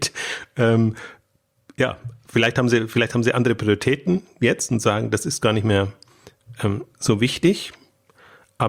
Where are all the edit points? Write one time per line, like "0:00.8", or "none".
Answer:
none

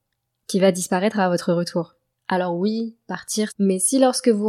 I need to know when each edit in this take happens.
0:02.2
0:03.5

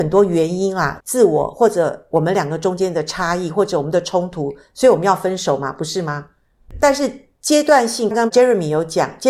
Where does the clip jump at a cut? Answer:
0:01.0
0:08.1

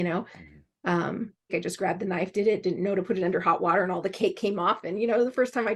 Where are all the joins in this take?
0:01.5

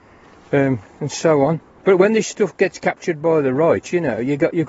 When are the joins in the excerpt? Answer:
none

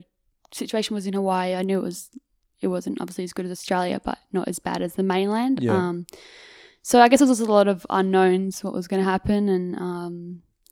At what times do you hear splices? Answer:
none

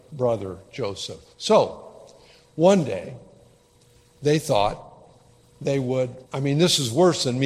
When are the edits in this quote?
0:06.3

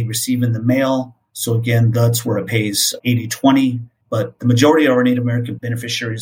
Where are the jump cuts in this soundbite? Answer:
0:04.0

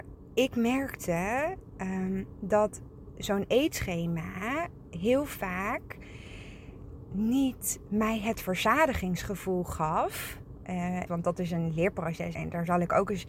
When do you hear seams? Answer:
0:11.1
0:12.3

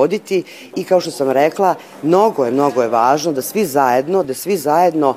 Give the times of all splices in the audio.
0:04.2

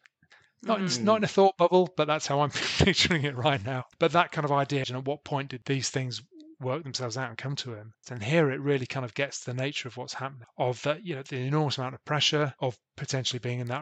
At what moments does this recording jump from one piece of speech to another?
0:04.8
0:08.0

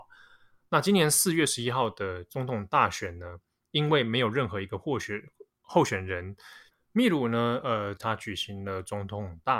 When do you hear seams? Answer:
0:06.7
0:08.0

